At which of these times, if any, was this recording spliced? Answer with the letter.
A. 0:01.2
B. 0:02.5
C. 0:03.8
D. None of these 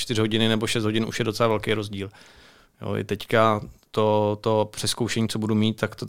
D